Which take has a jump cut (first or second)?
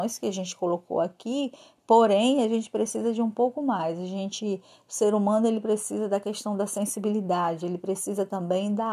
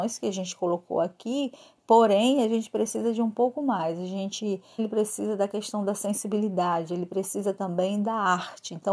second